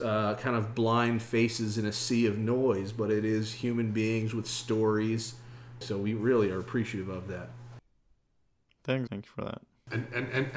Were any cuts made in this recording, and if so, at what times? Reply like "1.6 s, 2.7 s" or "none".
5.8 s, 9.1 s